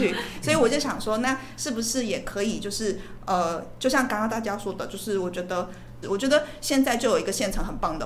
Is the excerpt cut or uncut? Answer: cut